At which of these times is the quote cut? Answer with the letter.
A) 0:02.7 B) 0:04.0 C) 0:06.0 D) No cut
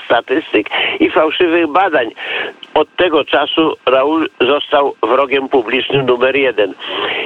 A